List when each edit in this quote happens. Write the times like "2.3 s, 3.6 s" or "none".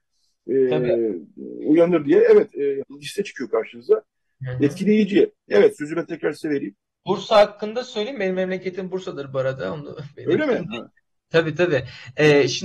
2.8 s